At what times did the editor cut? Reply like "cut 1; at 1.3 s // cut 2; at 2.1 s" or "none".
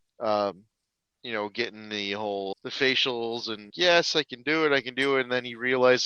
cut 1; at 2.5 s // cut 2; at 3.7 s